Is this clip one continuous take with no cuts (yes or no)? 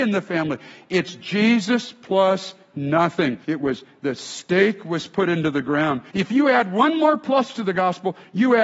no